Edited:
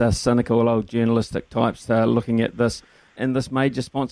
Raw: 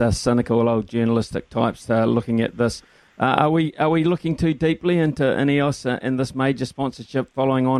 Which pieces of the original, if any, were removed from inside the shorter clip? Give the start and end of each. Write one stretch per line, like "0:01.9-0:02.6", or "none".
0:03.2-0:06.0